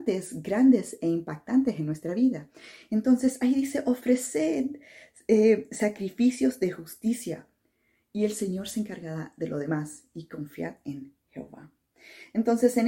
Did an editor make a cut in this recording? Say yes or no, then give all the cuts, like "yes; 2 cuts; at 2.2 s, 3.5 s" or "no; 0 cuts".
no; 0 cuts